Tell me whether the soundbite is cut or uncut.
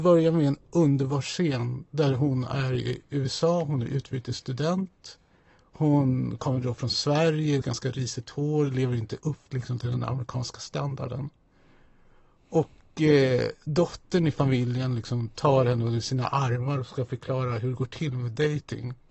cut